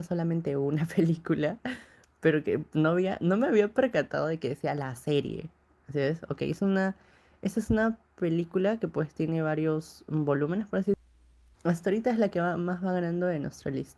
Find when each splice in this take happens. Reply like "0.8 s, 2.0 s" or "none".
11.5 s